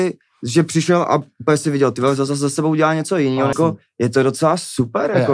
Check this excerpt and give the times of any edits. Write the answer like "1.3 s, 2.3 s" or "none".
2.3 s, 3.5 s